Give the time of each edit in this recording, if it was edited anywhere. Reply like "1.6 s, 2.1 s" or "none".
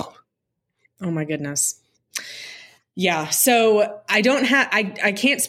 none